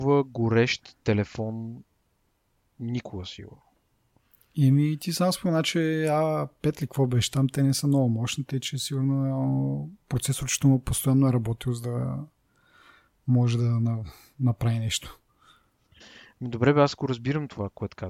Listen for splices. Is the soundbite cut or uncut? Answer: uncut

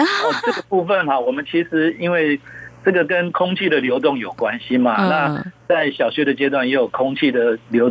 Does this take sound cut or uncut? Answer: uncut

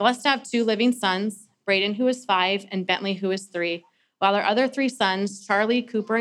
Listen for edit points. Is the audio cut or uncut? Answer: uncut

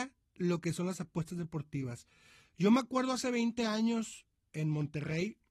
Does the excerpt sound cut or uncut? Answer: uncut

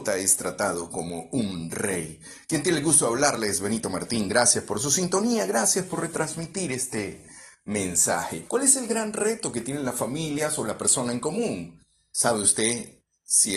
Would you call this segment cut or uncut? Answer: cut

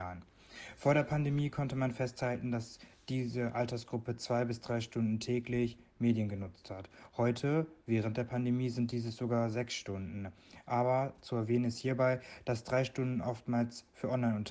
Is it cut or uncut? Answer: uncut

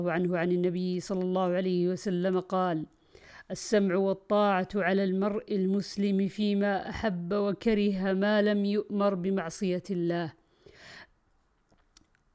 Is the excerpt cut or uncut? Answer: uncut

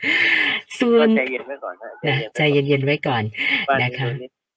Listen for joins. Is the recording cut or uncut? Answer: uncut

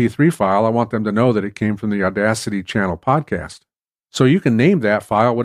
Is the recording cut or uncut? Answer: uncut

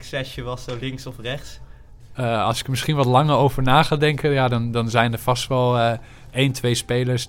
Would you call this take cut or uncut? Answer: cut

